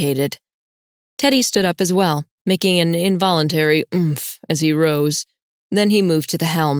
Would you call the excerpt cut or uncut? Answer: uncut